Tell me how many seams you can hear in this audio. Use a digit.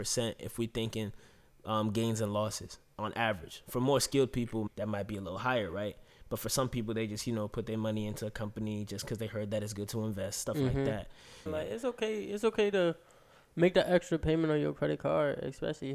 2